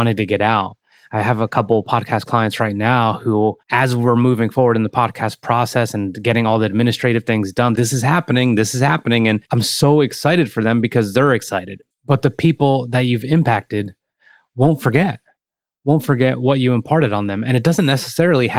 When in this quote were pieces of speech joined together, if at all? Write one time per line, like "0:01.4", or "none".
0:07.7
0:11.9